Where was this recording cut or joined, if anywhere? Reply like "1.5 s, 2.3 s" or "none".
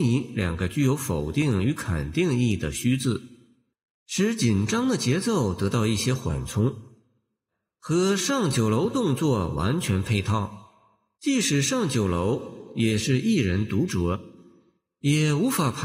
11.1 s